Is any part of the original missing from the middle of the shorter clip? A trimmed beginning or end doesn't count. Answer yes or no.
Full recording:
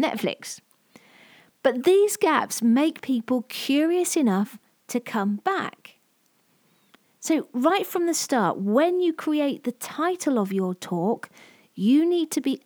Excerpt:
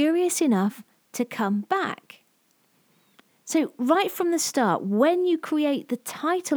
no